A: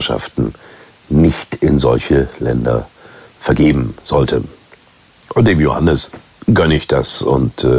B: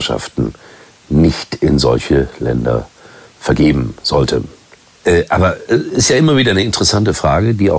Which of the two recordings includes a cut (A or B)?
B